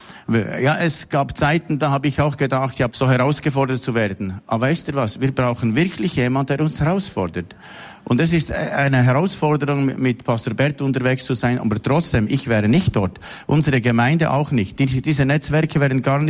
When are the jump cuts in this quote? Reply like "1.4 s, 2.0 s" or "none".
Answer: 2.9 s